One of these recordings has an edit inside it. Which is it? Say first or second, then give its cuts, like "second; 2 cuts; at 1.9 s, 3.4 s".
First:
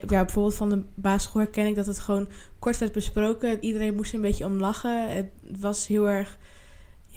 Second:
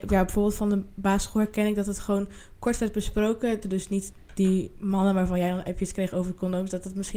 second; 1 cut; at 3.6 s